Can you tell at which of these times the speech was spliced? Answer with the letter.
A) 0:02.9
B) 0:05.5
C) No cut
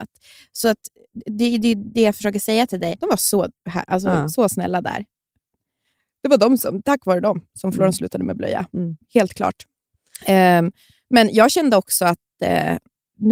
A